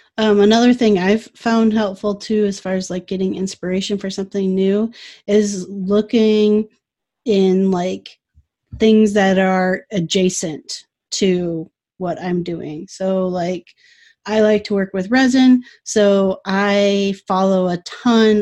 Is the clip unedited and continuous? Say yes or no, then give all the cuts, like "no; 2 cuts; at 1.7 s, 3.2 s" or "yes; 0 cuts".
yes; 0 cuts